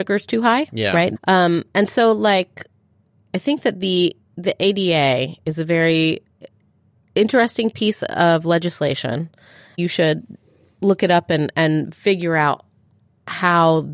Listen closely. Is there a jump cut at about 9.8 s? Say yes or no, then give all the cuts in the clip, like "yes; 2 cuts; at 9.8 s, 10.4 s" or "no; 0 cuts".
yes; 2 cuts; at 1.1 s, 9.8 s